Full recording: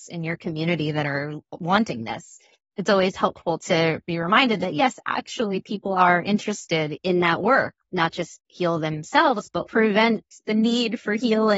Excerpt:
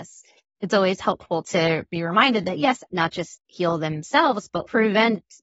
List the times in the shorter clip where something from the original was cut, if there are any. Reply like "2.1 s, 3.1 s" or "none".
2.9 s